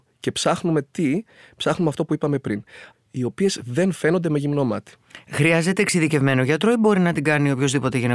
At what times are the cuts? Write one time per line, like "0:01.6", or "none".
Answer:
0:02.9